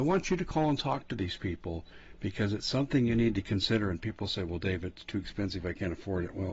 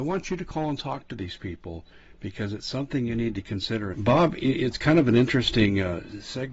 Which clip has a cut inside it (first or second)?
second